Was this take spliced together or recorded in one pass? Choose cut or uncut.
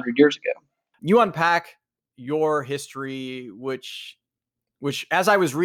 cut